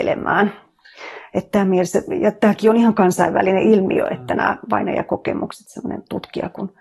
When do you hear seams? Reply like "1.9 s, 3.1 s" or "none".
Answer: none